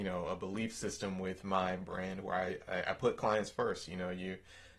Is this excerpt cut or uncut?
uncut